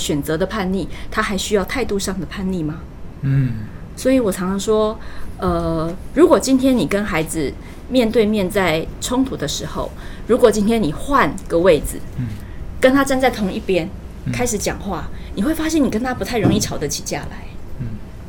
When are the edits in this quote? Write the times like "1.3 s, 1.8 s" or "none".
none

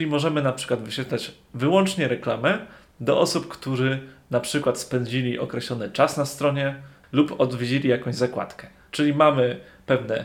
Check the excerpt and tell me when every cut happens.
7.0 s, 8.9 s

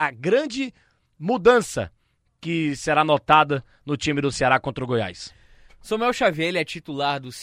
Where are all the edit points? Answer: none

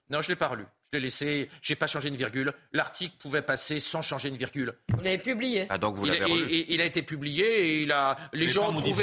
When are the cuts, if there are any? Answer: none

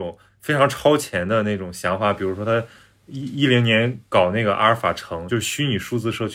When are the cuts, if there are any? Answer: none

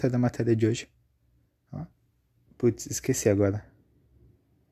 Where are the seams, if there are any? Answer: 2.5 s

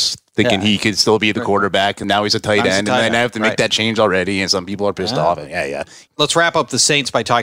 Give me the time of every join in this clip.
2.0 s, 6.1 s

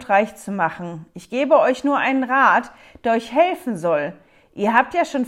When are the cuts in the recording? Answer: none

